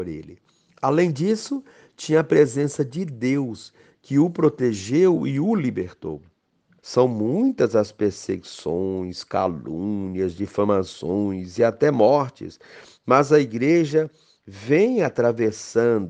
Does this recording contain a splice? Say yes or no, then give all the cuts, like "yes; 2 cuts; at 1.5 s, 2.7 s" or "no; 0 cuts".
yes; 1 cut; at 6.8 s